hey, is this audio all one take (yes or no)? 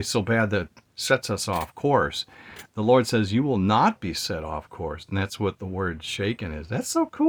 yes